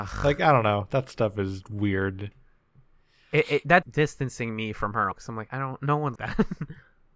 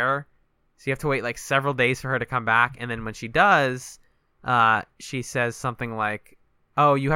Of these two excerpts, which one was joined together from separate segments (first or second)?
first